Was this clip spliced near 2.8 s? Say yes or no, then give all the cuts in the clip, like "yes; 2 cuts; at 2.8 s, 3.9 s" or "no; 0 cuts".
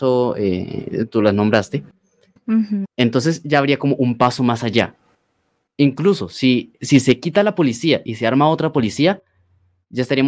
yes; 1 cut; at 2.8 s